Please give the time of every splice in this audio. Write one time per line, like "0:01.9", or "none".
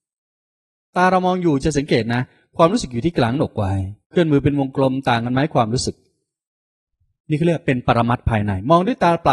0:04.0